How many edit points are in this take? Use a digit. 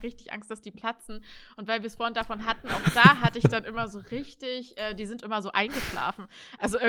0